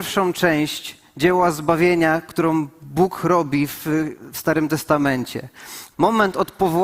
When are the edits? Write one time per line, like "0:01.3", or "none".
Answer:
0:05.9